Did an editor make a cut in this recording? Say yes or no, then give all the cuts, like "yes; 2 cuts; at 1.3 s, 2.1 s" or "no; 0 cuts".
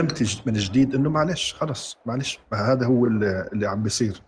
no; 0 cuts